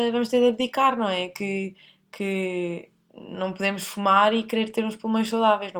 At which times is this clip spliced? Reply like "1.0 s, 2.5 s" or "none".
none

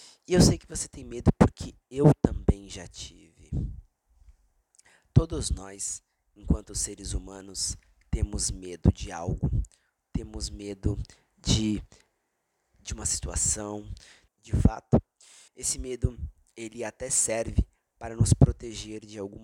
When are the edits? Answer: 14.3 s, 15.5 s

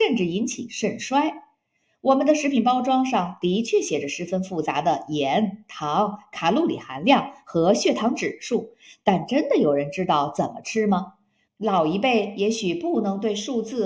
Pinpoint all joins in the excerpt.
11.5 s

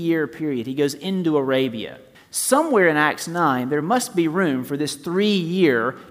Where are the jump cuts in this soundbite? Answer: 2.1 s

